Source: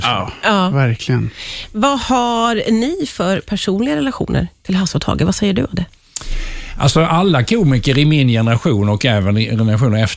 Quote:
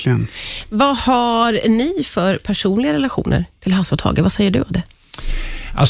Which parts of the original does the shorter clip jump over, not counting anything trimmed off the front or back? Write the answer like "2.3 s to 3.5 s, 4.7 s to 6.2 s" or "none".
none